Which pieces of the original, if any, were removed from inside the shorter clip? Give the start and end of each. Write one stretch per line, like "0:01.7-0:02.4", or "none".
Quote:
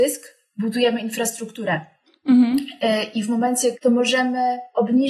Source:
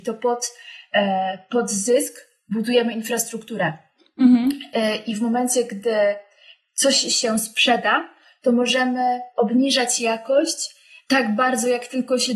0:05.7-0:08.4